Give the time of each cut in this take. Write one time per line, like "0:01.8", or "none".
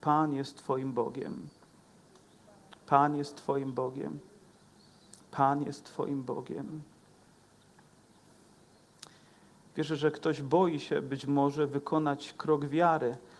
none